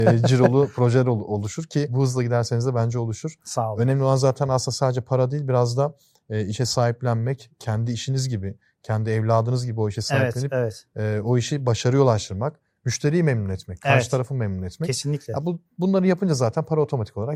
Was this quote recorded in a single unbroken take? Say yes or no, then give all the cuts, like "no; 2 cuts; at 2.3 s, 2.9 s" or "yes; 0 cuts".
yes; 0 cuts